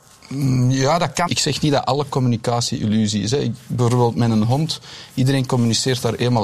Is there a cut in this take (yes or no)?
yes